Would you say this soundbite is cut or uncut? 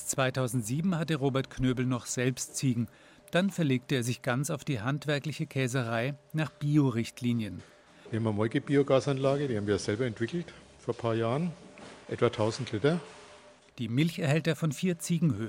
cut